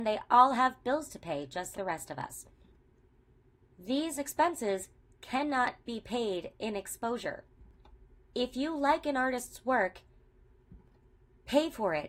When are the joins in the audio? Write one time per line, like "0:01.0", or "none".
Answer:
0:01.7